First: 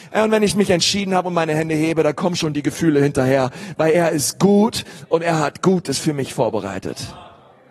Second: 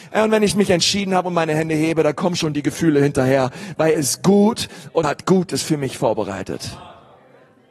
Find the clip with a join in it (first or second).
second